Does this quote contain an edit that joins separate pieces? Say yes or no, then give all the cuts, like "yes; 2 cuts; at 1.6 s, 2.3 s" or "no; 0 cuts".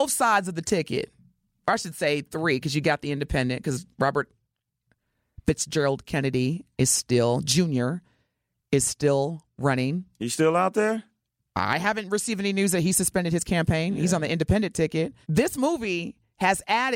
yes; 1 cut; at 15.2 s